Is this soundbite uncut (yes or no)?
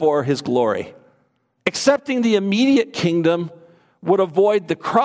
no